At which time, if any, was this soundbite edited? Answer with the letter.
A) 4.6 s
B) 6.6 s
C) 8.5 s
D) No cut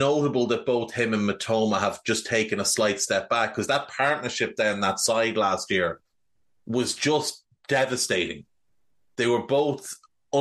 D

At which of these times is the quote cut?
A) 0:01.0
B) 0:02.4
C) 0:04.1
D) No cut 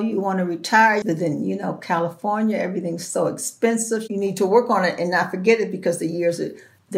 A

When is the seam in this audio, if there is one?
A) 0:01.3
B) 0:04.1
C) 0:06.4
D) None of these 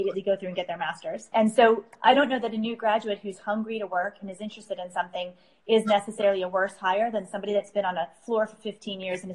D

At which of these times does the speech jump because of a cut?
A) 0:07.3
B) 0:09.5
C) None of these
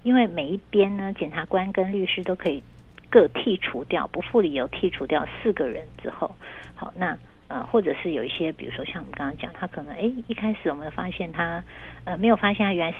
B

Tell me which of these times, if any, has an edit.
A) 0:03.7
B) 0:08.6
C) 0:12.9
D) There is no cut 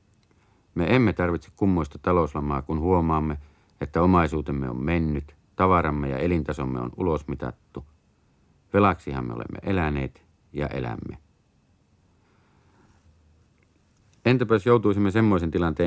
D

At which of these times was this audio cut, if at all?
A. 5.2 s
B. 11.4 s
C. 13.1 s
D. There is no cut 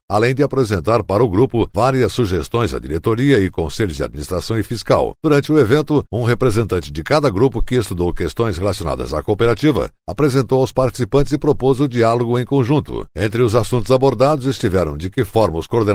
C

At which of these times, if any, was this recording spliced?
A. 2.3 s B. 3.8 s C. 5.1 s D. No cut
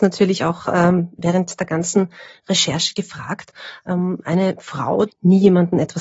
C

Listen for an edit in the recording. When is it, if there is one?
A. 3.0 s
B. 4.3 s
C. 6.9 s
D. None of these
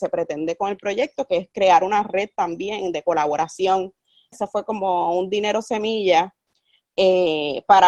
B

